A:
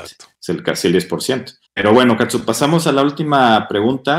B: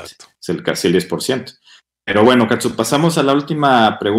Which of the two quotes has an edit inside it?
A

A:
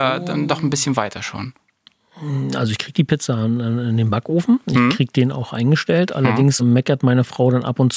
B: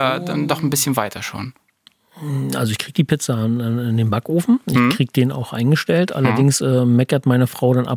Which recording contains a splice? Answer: A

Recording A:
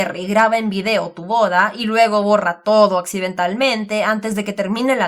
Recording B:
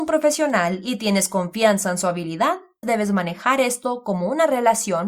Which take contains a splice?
B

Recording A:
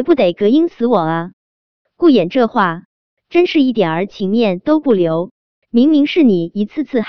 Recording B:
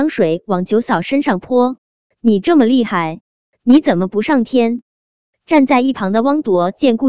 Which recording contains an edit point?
A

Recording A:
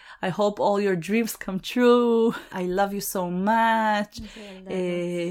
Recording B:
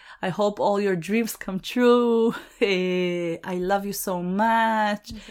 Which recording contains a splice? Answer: A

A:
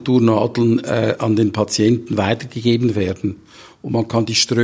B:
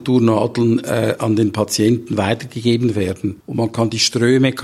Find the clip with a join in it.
B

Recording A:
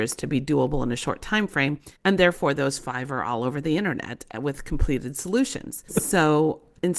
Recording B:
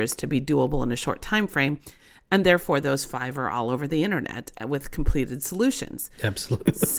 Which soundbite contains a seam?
A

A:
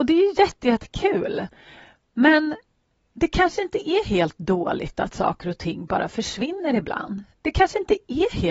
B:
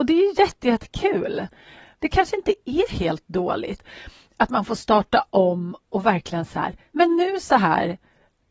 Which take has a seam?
B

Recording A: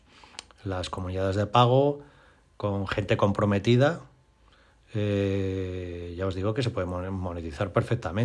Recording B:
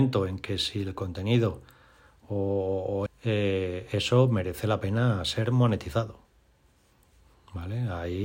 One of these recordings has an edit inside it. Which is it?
B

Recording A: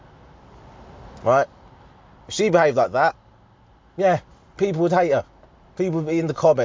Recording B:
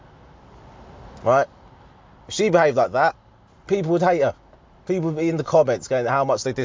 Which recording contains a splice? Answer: B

